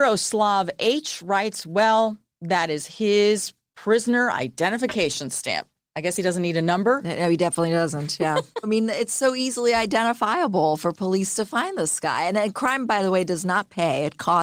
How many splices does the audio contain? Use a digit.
1